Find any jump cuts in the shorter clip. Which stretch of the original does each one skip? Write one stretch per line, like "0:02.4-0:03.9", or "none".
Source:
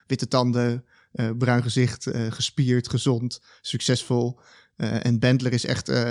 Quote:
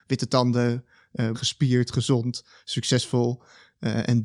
0:01.3-0:02.3